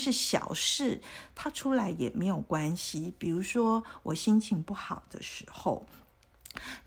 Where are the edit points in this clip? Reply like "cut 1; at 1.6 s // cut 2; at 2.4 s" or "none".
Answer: none